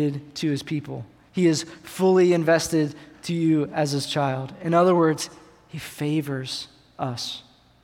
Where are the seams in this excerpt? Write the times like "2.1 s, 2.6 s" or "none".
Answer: none